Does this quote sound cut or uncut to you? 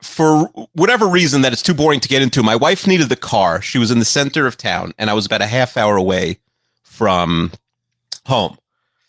uncut